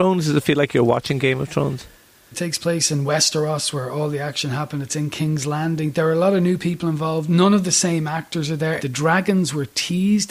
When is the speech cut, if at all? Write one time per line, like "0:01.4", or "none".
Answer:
0:02.3
0:08.8